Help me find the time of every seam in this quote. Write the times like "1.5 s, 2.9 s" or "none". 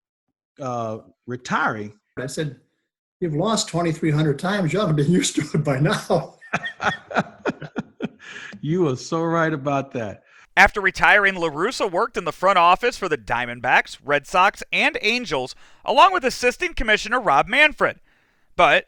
2.2 s